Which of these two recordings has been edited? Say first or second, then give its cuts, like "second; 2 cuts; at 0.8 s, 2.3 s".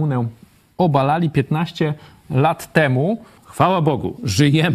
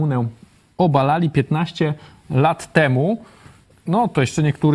first; 1 cut; at 3.4 s